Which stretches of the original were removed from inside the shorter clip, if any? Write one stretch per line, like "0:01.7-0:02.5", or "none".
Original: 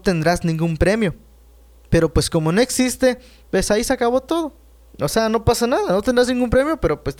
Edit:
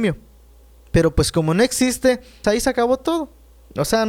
0:03.4-0:03.7